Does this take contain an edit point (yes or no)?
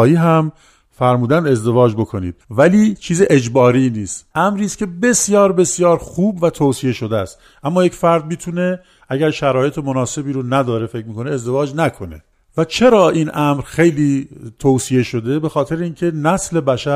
yes